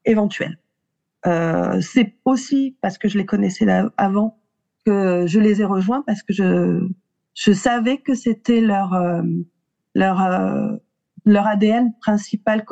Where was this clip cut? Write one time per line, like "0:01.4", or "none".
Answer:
0:01.1